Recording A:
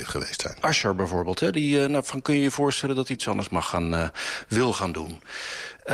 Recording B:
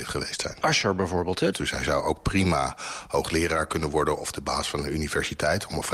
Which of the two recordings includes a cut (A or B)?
B